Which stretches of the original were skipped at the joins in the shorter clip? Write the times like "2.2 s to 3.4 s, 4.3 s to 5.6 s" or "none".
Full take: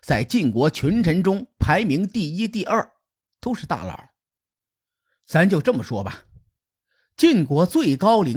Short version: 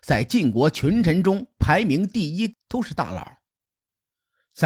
2.5 s to 3.2 s